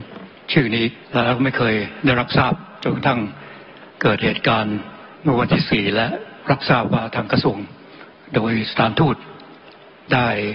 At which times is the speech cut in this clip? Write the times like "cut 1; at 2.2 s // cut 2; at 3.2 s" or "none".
cut 1; at 1.0 s // cut 2; at 5.1 s